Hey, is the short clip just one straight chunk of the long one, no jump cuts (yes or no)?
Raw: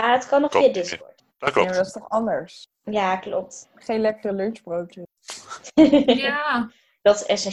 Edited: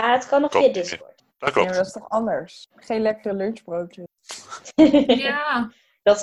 no